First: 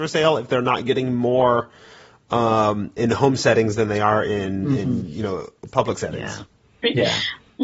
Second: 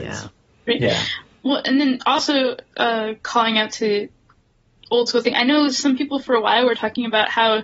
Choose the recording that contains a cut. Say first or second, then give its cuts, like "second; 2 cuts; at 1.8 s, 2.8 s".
first; 1 cut; at 3.0 s